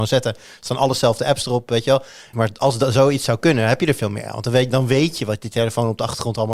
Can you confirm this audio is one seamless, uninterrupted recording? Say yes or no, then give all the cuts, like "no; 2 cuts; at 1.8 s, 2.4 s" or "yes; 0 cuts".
no; 1 cut; at 2.3 s